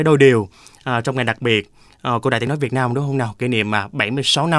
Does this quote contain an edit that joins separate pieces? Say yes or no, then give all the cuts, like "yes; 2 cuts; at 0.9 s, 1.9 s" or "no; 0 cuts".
no; 0 cuts